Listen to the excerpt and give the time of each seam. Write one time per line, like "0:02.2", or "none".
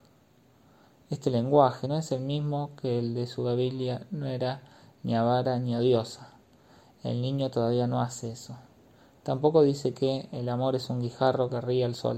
0:01.8